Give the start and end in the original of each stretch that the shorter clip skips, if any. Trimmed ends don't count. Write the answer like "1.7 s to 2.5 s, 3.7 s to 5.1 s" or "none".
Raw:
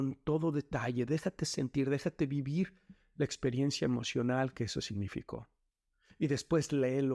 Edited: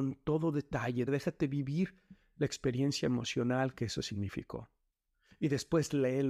1.1 s to 1.9 s

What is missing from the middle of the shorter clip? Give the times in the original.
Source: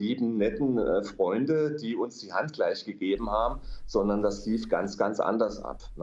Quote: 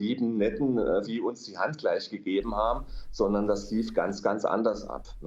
1.0 s to 1.8 s

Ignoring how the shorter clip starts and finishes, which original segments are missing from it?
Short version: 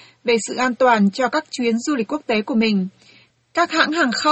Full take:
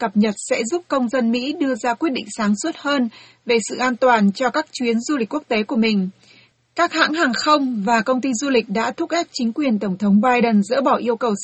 none

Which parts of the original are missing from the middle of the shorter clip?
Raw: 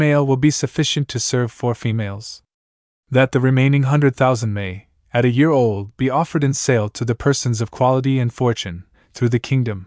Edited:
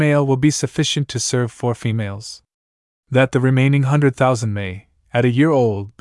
none

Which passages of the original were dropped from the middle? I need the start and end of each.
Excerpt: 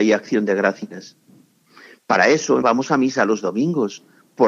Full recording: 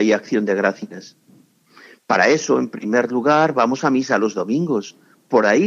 2.6 s to 3.5 s

